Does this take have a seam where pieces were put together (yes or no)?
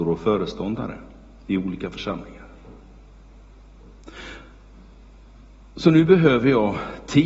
no